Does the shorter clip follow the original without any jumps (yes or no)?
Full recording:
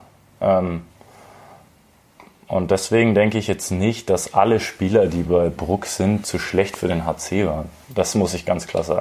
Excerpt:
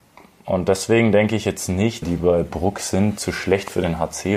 no